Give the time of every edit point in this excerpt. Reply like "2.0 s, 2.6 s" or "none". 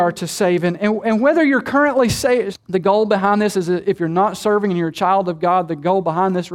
2.5 s